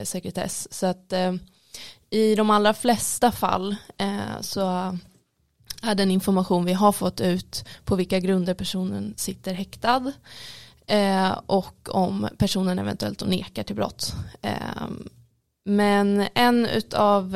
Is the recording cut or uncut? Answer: uncut